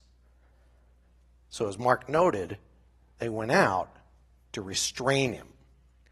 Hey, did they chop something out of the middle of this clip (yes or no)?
no